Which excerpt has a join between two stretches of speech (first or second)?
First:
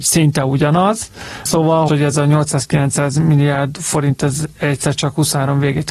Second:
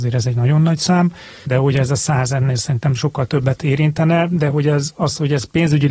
first